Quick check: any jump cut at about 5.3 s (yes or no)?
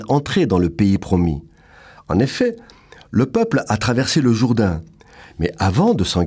yes